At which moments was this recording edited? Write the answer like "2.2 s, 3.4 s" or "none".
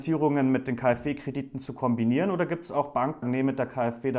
3.2 s

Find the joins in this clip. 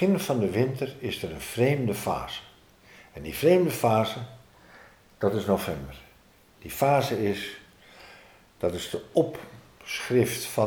none

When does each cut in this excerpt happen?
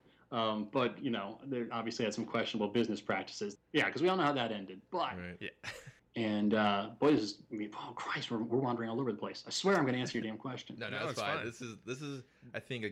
3.6 s, 6.0 s

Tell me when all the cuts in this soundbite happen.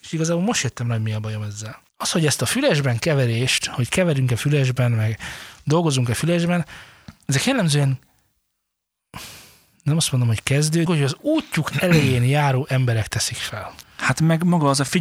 1.9 s, 10.9 s, 13.8 s

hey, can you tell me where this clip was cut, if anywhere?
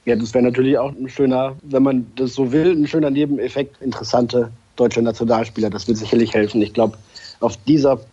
3.7 s

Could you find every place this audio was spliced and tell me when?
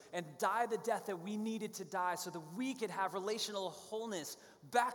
none

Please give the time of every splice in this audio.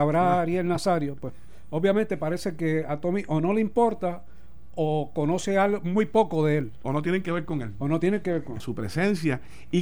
8.6 s

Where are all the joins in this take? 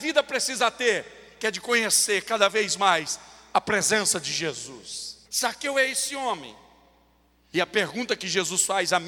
5.2 s, 7.5 s

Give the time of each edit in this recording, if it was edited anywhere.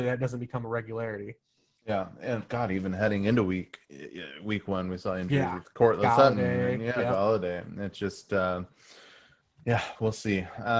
none

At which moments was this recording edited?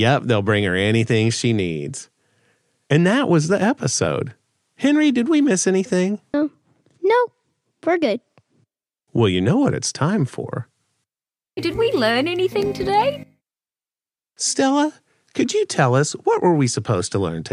6.3 s

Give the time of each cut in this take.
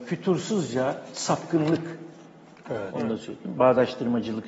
2.9 s

